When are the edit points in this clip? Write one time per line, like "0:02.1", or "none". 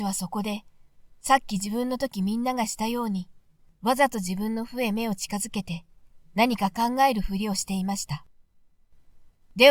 none